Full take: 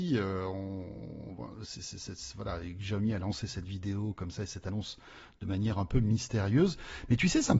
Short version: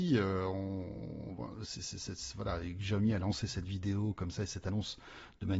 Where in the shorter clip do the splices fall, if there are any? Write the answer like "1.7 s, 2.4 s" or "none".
none